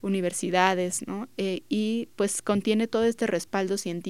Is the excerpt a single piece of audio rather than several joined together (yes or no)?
yes